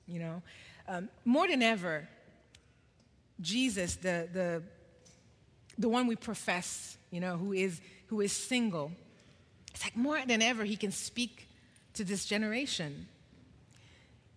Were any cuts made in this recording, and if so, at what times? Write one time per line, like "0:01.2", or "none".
none

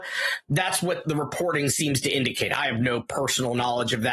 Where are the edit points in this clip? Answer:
0:01.0

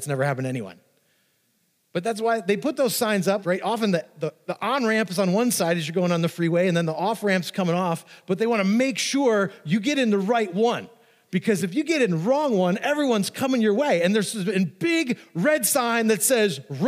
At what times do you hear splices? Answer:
0:03.4

